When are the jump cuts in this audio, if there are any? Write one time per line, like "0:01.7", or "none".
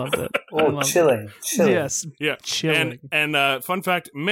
none